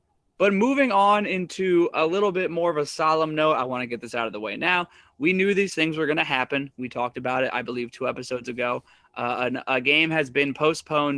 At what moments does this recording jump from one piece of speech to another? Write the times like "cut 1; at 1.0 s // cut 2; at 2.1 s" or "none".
none